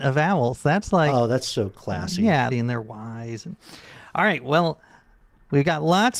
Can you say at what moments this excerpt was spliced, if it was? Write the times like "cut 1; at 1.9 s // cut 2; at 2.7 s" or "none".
cut 1; at 2.5 s